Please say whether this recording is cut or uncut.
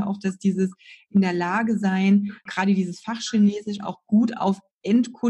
cut